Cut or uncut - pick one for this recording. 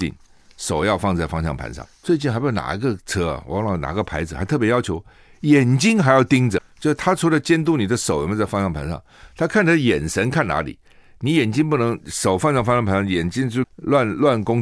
cut